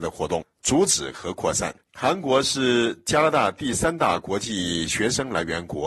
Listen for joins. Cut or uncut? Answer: cut